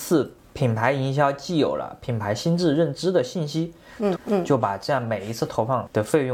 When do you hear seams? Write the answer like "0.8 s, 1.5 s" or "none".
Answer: 4.2 s